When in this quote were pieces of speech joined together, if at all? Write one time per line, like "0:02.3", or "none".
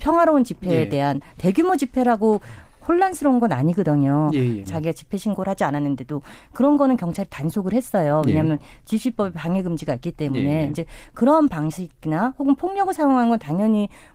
0:04.7